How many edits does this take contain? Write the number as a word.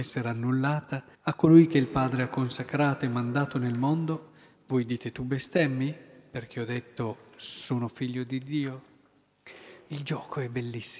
one